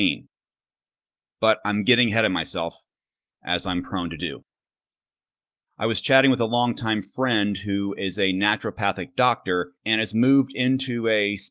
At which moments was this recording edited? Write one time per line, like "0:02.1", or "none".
0:05.7
0:09.8